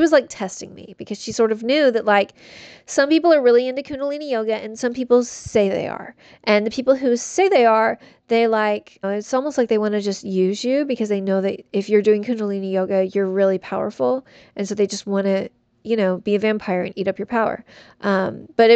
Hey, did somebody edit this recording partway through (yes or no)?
yes